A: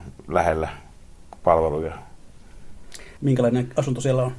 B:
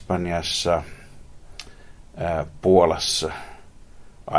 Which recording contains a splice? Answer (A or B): A